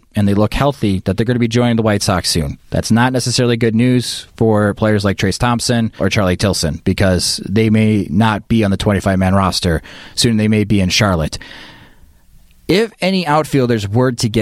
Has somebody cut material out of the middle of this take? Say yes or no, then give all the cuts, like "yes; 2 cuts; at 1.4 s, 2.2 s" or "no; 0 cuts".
yes; 1 cut; at 6.0 s